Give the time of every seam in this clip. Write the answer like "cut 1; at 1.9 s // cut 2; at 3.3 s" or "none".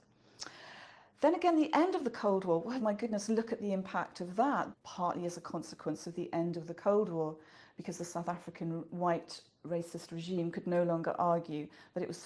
cut 1; at 2.8 s // cut 2; at 4.7 s